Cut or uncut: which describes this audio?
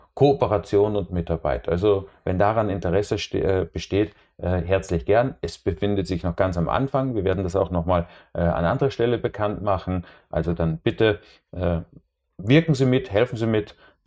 uncut